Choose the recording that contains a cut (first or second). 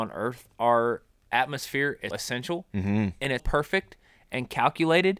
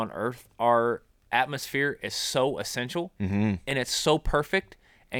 first